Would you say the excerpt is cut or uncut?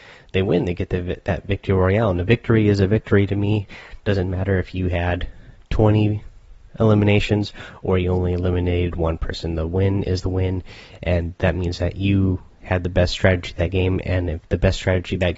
uncut